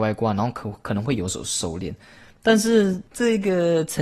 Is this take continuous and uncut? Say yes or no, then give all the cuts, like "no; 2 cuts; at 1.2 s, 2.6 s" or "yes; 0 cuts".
yes; 0 cuts